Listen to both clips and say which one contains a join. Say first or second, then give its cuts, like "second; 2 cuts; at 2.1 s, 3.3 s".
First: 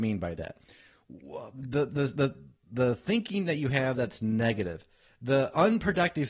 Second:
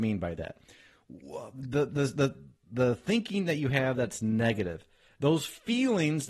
second; 1 cut; at 5.2 s